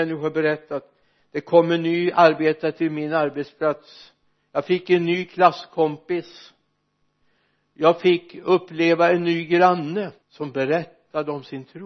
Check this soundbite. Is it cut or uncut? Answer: cut